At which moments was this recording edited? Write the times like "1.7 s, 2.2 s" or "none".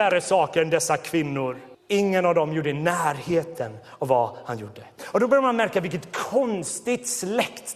1.7 s